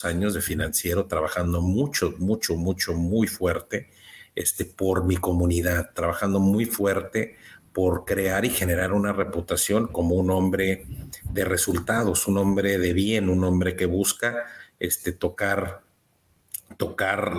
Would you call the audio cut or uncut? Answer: uncut